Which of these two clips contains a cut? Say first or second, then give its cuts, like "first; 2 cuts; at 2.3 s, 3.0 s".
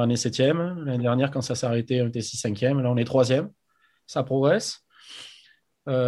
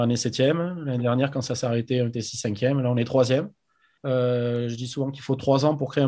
second; 1 cut; at 4.0 s